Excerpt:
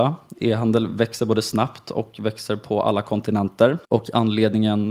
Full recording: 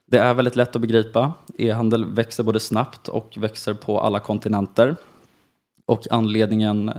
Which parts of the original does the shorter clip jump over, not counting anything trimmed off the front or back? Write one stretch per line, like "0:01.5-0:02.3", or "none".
0:05.0-0:05.8